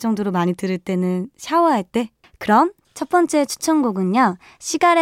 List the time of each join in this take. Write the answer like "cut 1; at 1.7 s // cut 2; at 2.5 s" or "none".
cut 1; at 2.2 s